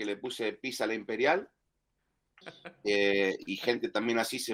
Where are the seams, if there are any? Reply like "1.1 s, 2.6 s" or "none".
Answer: 2.4 s